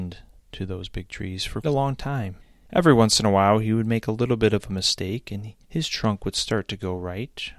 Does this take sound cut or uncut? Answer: cut